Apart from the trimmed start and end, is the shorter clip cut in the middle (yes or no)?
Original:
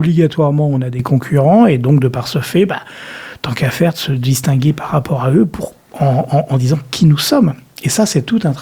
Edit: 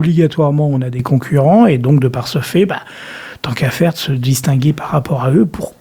no